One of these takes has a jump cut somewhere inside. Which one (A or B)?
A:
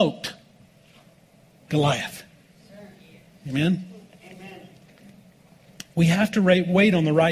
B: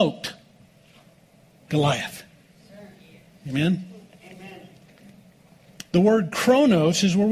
B